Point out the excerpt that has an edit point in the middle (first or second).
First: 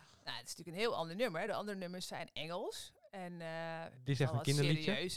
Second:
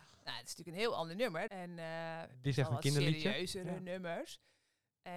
second